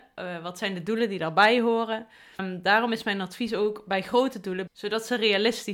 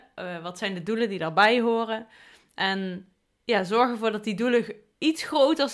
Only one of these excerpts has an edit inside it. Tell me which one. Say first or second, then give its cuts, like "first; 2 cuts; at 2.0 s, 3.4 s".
first; 2 cuts; at 2.4 s, 4.7 s